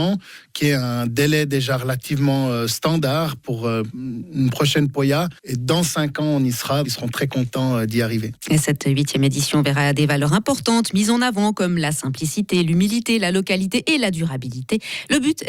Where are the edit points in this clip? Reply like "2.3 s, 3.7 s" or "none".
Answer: 5.4 s, 6.8 s